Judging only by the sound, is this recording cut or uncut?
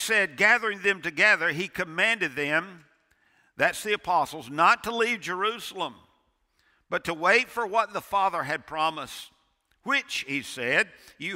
uncut